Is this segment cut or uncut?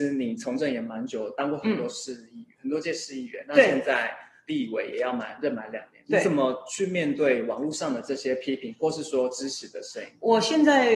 uncut